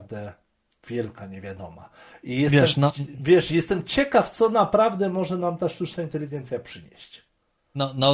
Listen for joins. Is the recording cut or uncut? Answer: uncut